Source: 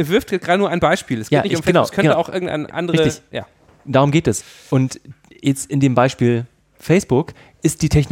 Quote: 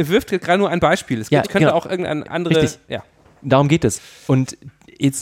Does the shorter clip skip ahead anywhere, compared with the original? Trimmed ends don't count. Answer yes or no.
yes